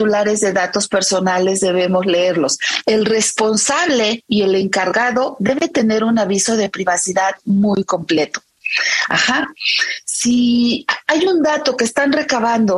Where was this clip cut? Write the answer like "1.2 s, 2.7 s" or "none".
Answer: 2.8 s, 9.1 s